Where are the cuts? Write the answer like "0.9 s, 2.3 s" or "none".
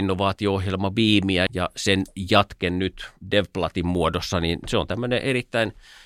1.5 s